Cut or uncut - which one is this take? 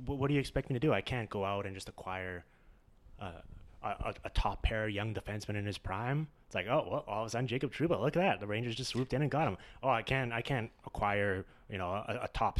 uncut